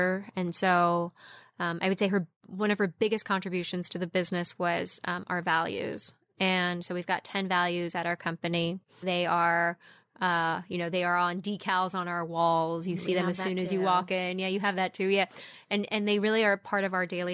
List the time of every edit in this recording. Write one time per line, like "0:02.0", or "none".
0:09.0